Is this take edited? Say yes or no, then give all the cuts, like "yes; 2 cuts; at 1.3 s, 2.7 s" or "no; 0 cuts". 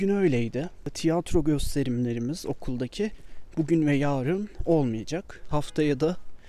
no; 0 cuts